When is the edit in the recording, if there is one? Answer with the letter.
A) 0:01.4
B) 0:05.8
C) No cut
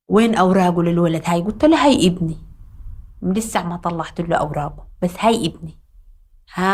A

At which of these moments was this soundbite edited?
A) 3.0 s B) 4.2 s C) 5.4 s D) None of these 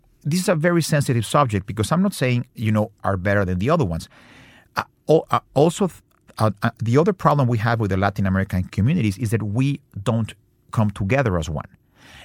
A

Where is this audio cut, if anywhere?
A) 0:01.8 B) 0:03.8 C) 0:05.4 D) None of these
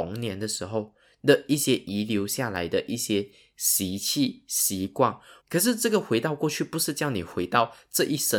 C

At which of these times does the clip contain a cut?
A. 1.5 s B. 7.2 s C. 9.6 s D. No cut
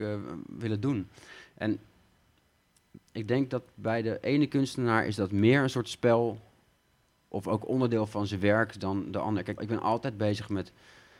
C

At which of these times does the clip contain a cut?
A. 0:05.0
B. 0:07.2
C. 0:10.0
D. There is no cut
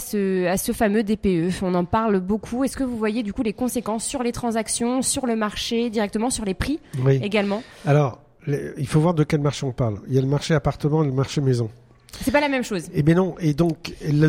D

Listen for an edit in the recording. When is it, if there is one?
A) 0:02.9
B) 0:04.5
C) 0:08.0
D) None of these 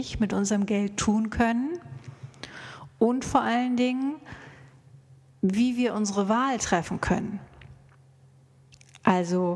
D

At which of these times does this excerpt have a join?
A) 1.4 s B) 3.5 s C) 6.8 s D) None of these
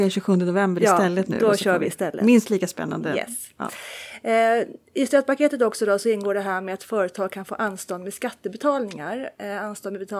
D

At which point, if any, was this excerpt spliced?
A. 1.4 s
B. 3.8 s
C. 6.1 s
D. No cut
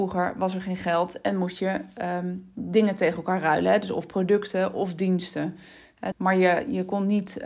C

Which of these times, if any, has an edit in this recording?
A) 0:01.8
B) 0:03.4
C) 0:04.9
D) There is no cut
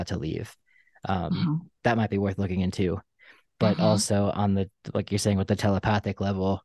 D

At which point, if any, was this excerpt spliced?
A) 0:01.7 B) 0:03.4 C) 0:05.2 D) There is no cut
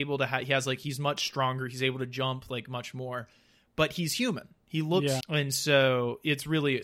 C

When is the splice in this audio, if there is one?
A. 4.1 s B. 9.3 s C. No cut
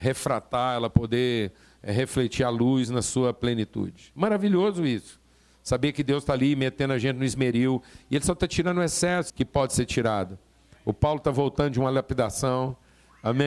B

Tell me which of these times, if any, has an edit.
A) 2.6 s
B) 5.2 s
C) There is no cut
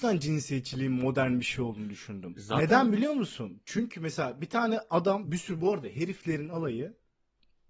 B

